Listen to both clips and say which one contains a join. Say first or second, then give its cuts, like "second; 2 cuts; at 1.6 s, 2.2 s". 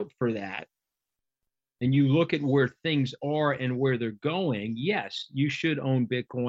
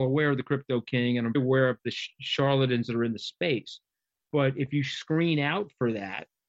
second; 1 cut; at 1.3 s